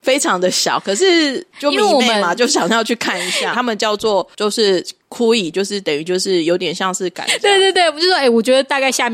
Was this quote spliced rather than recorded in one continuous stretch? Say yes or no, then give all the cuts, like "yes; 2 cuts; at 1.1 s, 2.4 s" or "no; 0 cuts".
yes; 3 cuts; at 3.5 s, 5.5 s, 7.3 s